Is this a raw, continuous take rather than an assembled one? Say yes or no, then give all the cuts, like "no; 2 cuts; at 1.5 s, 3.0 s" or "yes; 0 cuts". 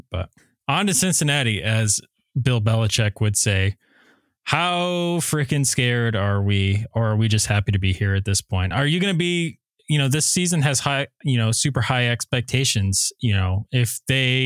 yes; 0 cuts